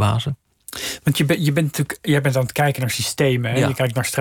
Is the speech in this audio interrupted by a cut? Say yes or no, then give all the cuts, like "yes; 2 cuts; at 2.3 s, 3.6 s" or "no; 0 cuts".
no; 0 cuts